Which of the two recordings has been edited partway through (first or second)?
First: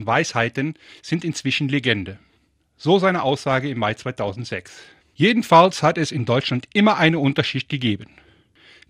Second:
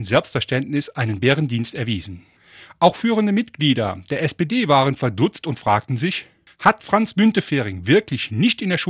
first